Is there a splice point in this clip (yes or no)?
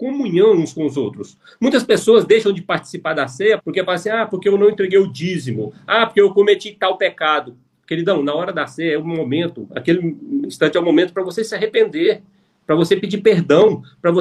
yes